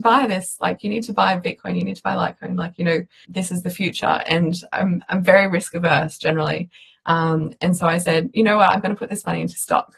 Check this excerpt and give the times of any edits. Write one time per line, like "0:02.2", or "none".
0:03.2